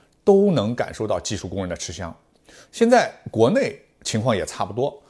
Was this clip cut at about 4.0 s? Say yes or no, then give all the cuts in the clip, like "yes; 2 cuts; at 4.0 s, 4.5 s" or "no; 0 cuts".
no; 1 cut; at 2.7 s